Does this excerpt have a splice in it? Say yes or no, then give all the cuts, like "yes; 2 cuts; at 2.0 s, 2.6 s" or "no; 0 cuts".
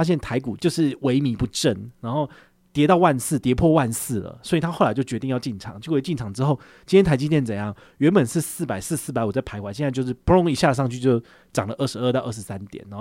no; 0 cuts